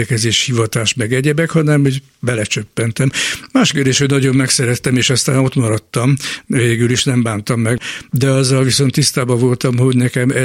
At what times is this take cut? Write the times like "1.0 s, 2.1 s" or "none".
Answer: none